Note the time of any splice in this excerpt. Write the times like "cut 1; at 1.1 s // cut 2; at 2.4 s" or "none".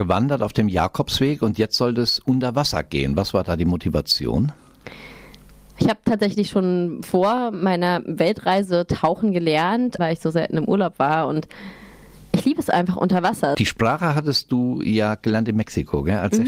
cut 1; at 10.0 s // cut 2; at 13.5 s